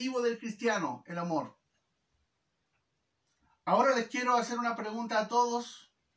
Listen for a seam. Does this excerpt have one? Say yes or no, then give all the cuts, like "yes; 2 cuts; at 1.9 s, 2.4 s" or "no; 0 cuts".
no; 0 cuts